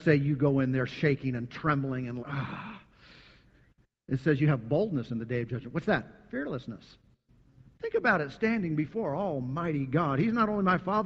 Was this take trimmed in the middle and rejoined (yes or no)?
yes